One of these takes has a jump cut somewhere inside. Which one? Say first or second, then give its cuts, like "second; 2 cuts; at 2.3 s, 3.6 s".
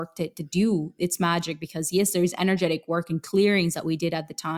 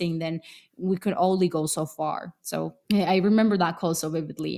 second; 1 cut; at 2.8 s